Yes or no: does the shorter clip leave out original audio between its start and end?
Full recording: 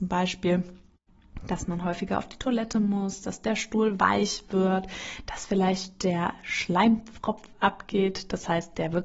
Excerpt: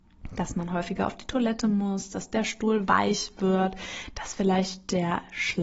no